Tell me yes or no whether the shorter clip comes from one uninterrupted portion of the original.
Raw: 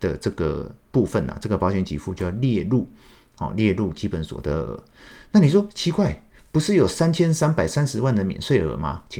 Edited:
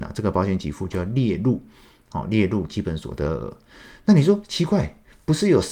yes